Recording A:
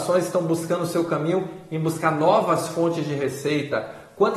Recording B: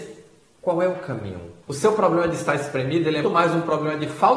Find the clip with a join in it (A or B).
B